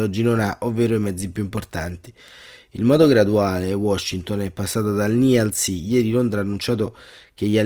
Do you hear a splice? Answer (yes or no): no